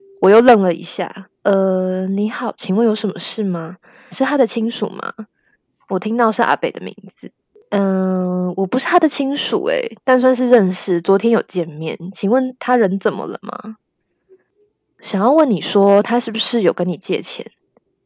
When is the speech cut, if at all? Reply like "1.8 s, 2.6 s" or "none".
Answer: 4.1 s